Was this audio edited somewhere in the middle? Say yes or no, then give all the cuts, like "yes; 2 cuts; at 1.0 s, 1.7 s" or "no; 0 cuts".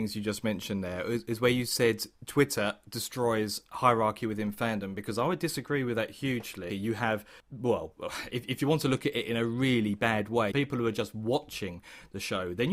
yes; 2 cuts; at 6.7 s, 10.5 s